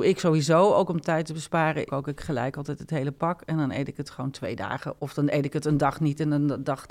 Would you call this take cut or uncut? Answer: cut